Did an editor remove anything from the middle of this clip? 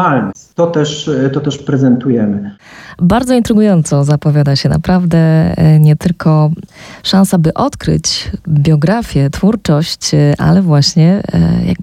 no; 0 cuts

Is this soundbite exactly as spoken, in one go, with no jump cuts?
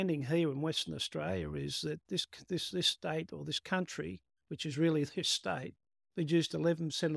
yes; 0 cuts

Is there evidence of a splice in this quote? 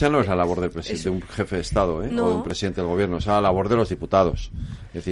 no; 0 cuts

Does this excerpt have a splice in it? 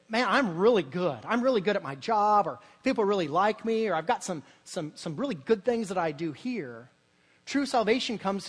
no; 0 cuts

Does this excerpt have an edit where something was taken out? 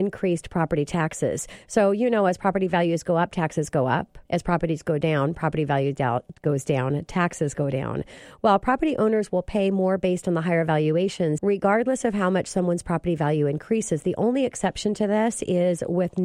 yes; 2 cuts; at 4.2 s, 11.4 s

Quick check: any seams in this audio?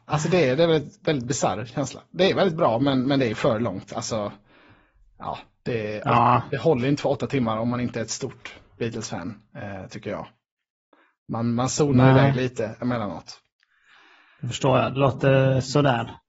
no; 0 cuts

